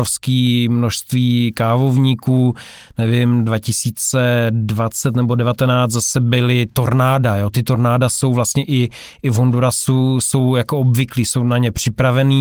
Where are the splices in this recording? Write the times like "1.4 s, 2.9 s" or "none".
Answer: none